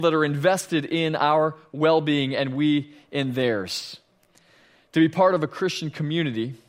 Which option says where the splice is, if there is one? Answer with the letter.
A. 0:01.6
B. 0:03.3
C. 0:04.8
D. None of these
D